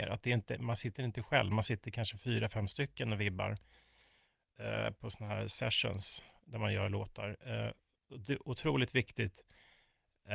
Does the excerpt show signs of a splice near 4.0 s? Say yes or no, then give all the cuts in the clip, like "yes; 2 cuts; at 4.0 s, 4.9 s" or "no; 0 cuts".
no; 0 cuts